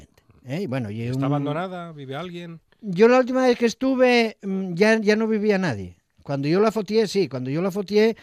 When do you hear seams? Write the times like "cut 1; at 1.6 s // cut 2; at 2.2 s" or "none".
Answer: none